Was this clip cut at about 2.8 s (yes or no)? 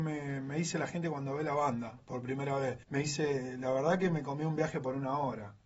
yes